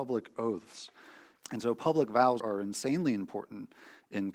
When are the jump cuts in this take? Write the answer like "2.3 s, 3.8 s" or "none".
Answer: 1.4 s, 2.4 s